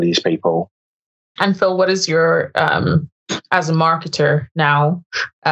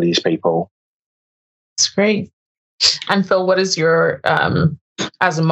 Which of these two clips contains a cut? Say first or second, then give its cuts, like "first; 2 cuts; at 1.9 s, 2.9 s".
first; 1 cut; at 1.4 s